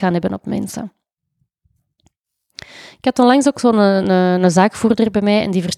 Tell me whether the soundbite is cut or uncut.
uncut